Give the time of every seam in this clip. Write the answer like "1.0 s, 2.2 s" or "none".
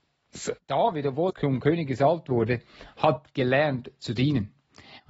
1.3 s